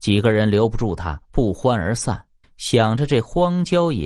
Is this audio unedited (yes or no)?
no